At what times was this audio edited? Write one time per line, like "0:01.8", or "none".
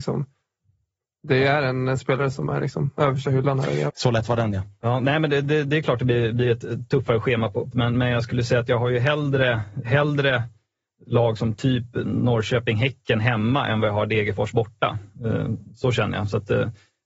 0:03.9
0:07.7
0:09.8